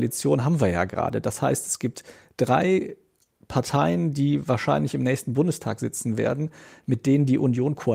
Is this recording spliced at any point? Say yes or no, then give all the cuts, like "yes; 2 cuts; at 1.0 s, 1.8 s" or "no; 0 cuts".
no; 0 cuts